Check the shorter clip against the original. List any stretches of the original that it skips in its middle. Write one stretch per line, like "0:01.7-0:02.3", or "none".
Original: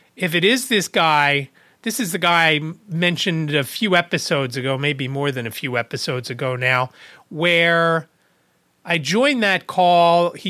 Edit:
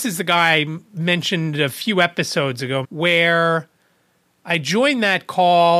0:04.8-0:07.2